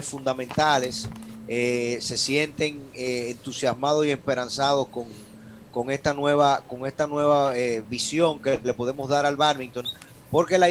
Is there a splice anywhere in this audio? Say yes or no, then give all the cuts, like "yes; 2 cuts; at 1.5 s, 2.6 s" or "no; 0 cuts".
no; 0 cuts